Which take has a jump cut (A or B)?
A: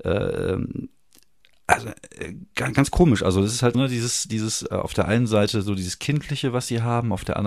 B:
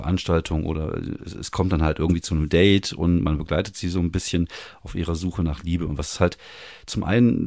A